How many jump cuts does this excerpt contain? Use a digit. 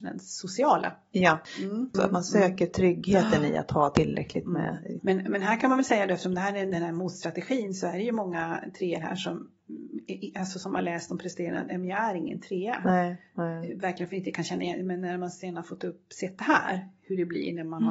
1